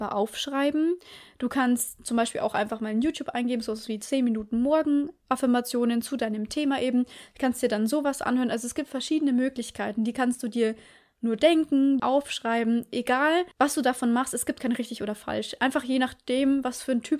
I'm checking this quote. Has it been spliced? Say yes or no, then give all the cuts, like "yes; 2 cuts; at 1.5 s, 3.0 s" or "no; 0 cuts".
yes; 2 cuts; at 12.0 s, 13.5 s